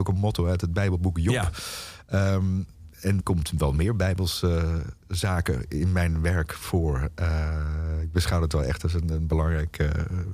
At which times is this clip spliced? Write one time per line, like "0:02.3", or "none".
0:03.2